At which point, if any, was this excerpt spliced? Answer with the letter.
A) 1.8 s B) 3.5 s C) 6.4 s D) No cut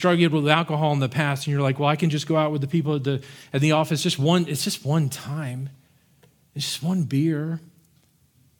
D